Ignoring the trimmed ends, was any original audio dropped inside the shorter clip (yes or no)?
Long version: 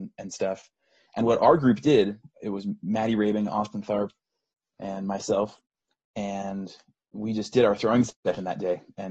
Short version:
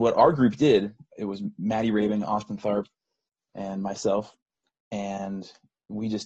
no